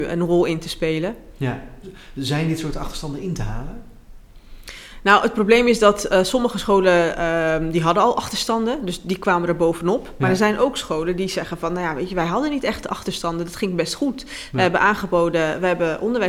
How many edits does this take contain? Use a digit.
0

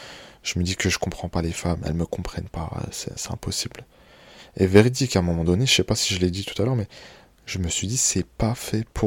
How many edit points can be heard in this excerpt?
0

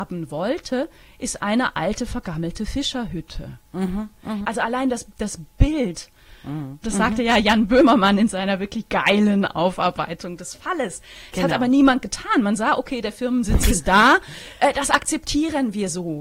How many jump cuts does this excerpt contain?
2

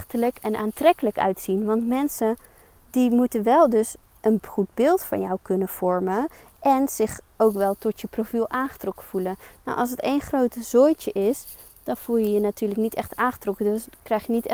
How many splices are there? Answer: 0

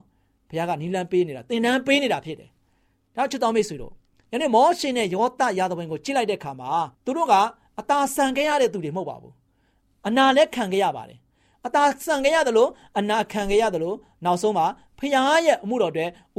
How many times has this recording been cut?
1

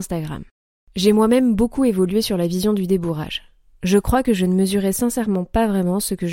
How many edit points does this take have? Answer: 0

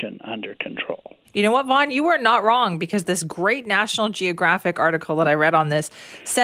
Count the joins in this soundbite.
0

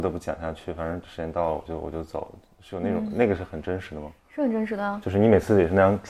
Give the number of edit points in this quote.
1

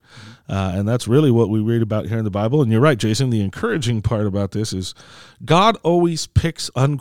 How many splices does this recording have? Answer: 0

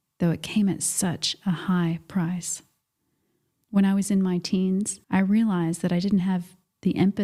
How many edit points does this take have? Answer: 2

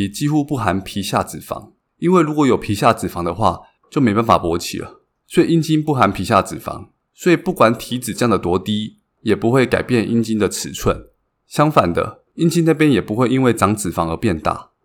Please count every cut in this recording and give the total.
2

